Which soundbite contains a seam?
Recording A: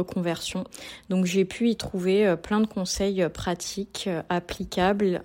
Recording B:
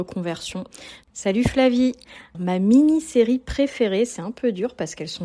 B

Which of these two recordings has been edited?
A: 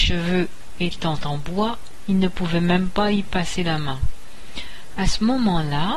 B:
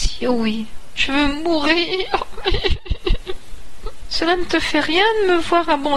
B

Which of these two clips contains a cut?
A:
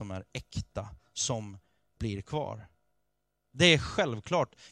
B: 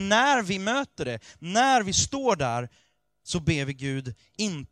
A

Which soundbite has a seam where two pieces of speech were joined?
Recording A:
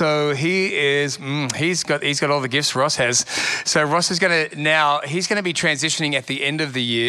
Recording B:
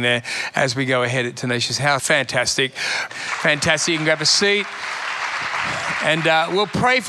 B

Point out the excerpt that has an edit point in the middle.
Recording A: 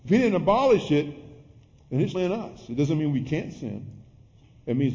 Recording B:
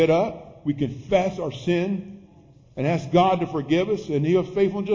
A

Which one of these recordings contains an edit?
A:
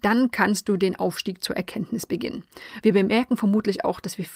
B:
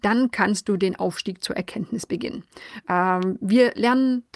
A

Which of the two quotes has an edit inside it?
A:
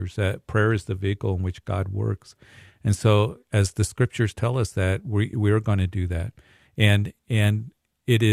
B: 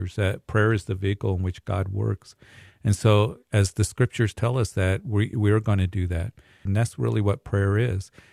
B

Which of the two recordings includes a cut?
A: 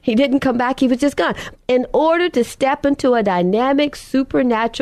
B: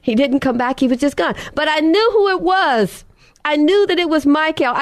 A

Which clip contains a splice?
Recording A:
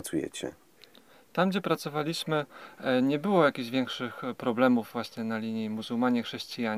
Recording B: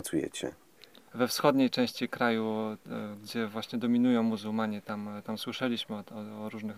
B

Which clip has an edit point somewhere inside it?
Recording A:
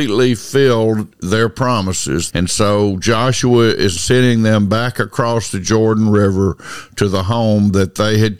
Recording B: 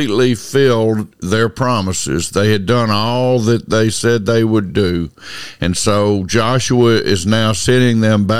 A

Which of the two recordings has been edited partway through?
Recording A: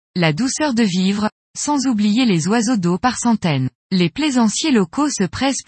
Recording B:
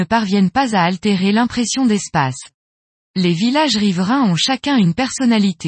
A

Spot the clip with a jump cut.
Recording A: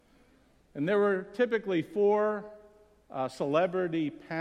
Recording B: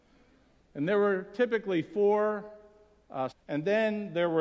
B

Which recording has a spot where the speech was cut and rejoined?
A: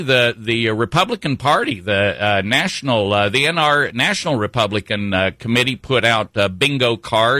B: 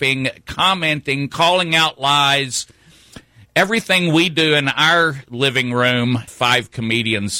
B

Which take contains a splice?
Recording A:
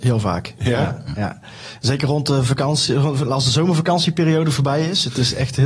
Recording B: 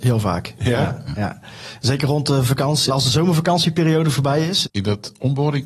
B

